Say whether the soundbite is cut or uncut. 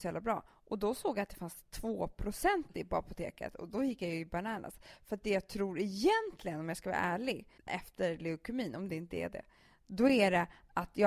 cut